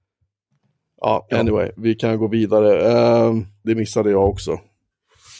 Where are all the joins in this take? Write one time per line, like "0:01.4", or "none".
0:01.8
0:03.6